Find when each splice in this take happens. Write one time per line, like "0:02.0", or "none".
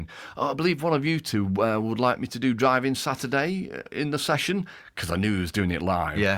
none